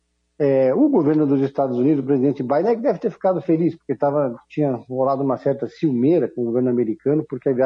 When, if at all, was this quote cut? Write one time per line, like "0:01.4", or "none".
none